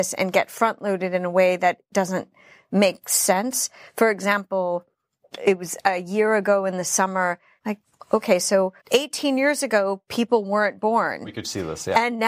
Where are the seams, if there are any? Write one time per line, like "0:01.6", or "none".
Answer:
0:07.6
0:08.8